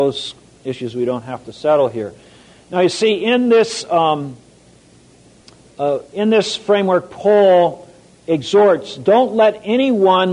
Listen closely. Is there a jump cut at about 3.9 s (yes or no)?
no